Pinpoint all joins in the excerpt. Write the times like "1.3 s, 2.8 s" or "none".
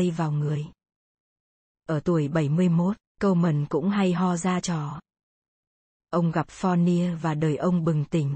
none